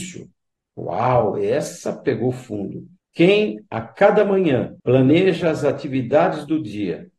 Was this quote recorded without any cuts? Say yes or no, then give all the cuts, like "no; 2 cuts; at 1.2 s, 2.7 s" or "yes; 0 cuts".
no; 2 cuts; at 3.0 s, 4.8 s